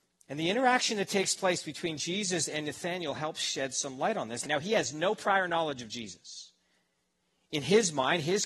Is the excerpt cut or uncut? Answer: cut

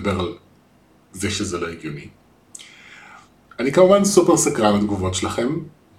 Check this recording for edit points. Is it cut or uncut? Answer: uncut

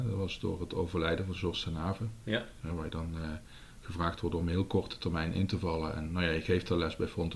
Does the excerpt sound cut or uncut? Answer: uncut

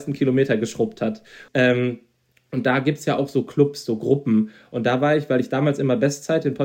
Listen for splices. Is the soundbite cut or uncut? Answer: cut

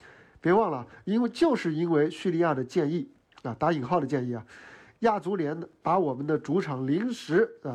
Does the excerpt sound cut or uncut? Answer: uncut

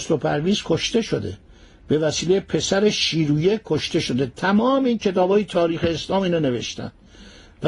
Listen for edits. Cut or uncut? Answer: uncut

